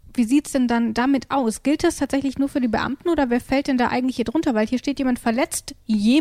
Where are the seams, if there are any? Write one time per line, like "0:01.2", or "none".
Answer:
none